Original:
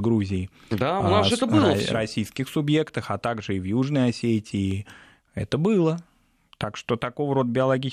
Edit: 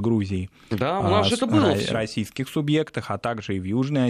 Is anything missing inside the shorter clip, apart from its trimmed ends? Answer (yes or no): no